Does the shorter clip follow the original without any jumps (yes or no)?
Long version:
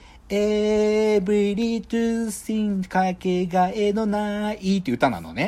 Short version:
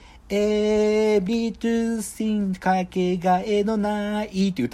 no